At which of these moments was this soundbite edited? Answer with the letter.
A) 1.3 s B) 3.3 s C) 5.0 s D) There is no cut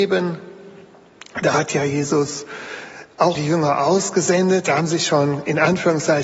B